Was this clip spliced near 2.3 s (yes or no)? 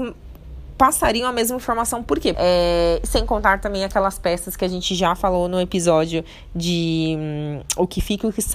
yes